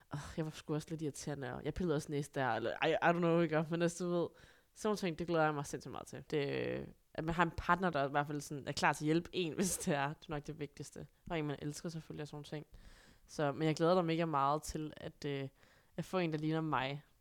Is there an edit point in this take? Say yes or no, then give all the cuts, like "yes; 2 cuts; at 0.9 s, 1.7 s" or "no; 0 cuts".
yes; 1 cut; at 6.3 s